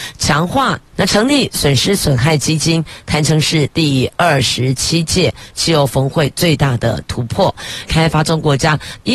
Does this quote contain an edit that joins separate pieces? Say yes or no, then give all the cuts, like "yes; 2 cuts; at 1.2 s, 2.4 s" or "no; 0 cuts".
yes; 2 cuts; at 0.9 s, 7.9 s